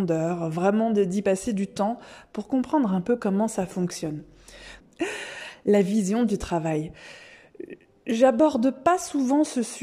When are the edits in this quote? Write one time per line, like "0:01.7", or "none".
0:04.8

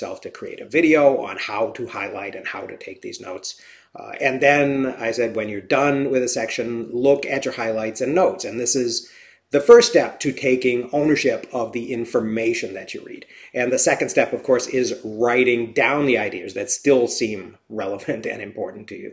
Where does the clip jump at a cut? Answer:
none

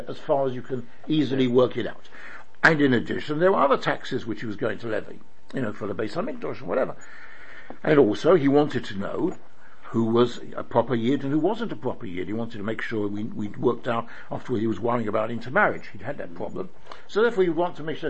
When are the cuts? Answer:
none

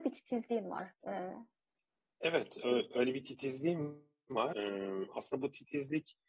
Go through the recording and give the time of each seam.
0:01.0

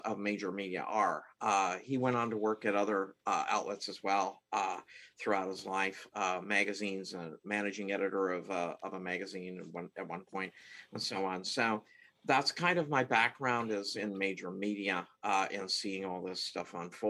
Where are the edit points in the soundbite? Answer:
none

